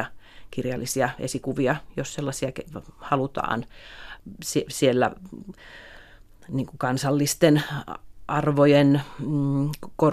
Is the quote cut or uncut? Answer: uncut